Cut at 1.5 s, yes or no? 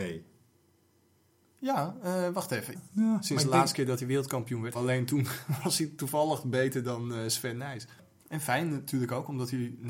no